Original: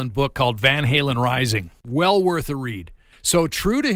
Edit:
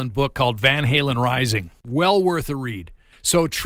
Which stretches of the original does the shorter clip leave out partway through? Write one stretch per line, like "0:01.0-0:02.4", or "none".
none